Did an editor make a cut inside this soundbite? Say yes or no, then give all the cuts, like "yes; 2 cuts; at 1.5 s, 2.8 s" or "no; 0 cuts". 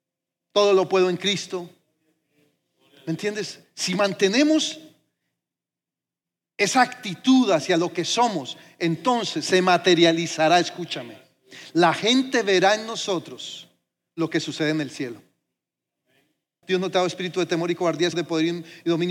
yes; 2 cuts; at 16.6 s, 18.1 s